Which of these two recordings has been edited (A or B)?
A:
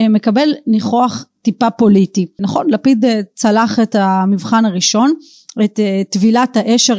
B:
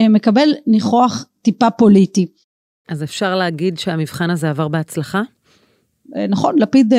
A